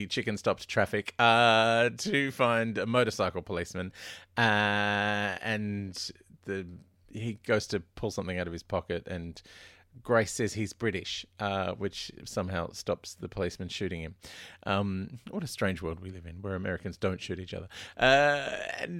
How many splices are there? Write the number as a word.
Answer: zero